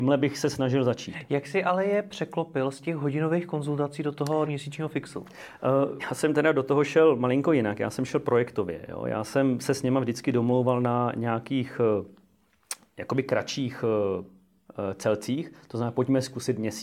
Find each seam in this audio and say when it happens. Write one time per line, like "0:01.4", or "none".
0:04.5
0:06.0